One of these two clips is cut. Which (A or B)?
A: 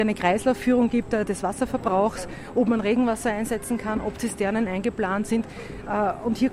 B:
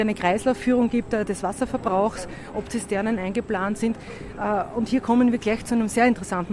B